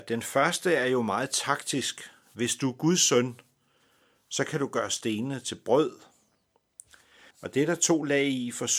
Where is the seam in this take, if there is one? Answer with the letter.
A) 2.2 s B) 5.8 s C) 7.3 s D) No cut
C